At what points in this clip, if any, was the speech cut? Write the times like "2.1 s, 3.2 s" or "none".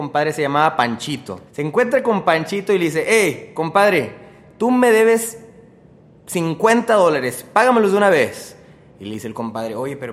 1.5 s